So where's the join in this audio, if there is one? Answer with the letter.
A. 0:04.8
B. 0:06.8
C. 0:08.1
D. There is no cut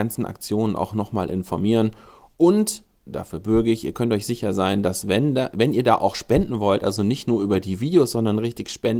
D